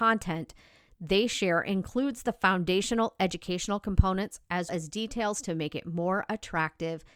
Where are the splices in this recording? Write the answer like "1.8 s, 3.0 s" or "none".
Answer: 4.7 s